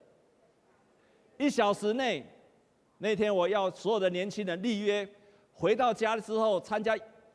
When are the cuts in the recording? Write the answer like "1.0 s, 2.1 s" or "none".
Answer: none